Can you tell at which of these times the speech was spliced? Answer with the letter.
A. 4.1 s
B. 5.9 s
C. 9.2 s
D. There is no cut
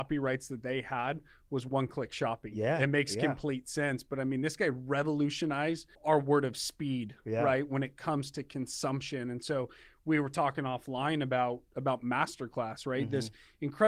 B